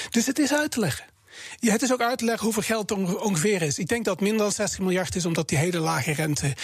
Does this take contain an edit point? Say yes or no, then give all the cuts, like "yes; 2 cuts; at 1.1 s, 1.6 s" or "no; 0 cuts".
no; 0 cuts